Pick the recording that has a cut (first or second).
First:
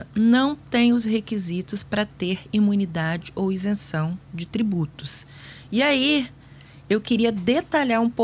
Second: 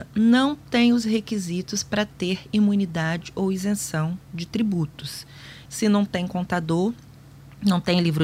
second